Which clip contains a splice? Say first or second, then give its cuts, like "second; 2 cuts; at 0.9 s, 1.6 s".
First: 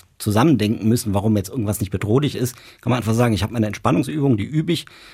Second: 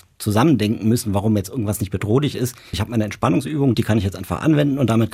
second; 2 cuts; at 2.7 s, 3.7 s